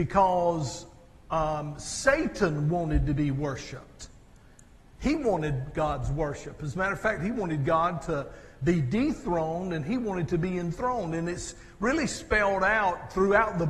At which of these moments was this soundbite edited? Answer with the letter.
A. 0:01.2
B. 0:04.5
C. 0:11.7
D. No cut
D